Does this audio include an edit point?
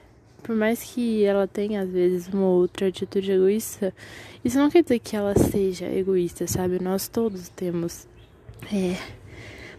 no; 0 cuts

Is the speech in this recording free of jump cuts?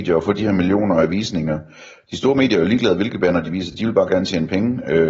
yes; 0 cuts

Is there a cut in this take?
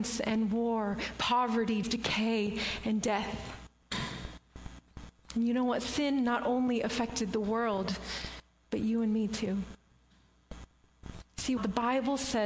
yes; 2 cuts; at 1.8 s, 11.6 s

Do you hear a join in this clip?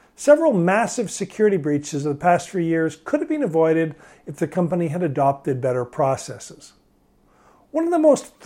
no; 0 cuts

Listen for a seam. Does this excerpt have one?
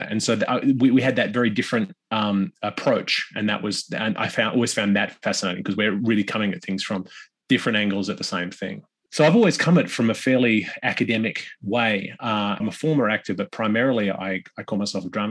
yes; 2 cuts; at 9.1 s, 12.6 s

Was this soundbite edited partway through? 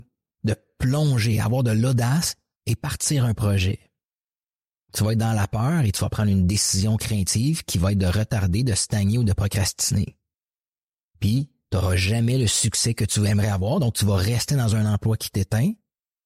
no; 0 cuts

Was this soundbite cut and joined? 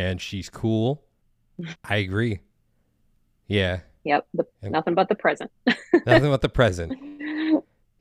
yes; 1 cut; at 1.7 s

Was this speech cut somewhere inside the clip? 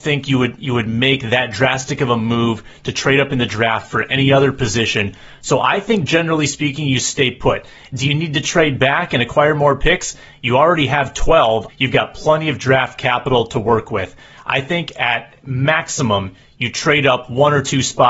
yes; 1 cut; at 11.7 s

